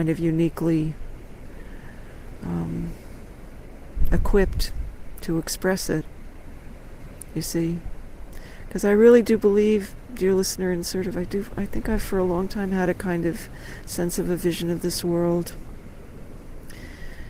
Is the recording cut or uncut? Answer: uncut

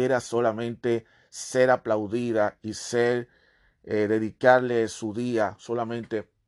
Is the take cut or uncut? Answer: uncut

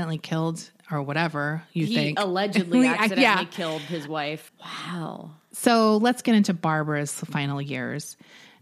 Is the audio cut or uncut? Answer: cut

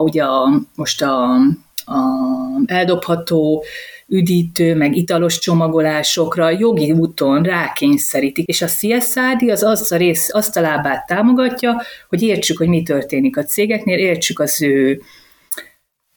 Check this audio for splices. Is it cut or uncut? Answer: cut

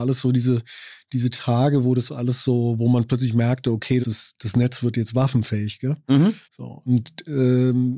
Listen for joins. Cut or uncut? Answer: cut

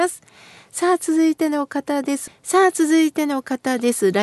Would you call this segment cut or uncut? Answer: cut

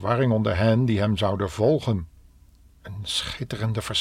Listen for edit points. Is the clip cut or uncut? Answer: cut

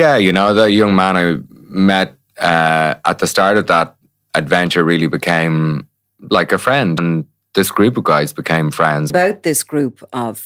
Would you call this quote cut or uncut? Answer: cut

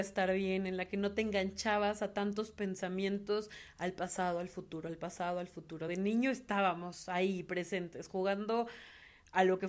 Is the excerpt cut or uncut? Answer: uncut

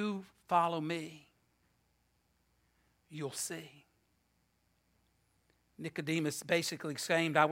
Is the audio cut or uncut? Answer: uncut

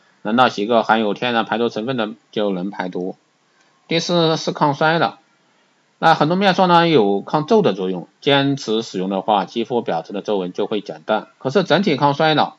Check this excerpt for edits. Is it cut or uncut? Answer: uncut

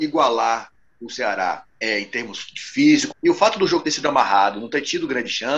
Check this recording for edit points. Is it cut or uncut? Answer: cut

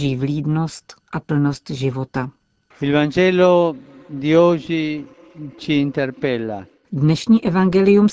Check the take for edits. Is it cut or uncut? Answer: cut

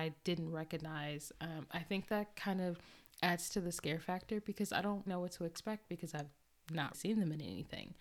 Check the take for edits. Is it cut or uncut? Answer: cut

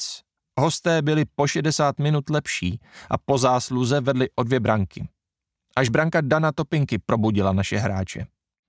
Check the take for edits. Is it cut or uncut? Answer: uncut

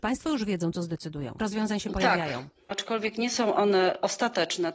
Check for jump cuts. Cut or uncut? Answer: cut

